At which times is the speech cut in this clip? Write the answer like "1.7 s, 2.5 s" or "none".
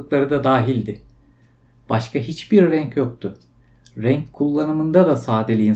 none